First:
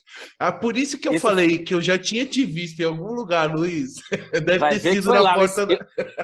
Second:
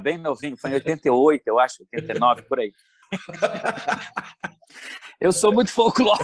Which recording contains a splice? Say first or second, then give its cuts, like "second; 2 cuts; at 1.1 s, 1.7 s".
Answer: second; 1 cut; at 3.0 s